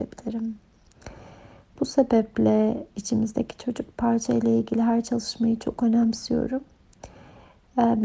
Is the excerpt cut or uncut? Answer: uncut